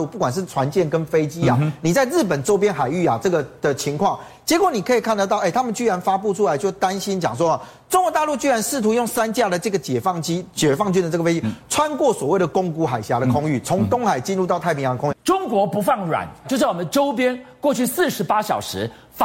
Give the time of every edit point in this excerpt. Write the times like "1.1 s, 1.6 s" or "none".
15.1 s, 16.4 s